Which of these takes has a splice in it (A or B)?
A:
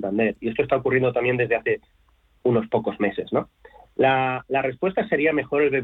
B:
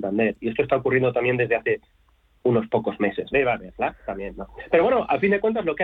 B